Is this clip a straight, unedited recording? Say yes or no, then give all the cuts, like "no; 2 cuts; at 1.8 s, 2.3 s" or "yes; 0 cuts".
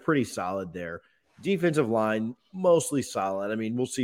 yes; 0 cuts